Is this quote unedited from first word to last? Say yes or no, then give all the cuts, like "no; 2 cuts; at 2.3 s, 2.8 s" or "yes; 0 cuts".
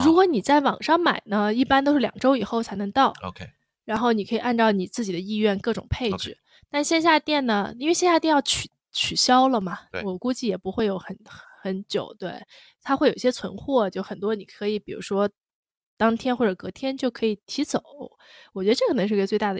yes; 0 cuts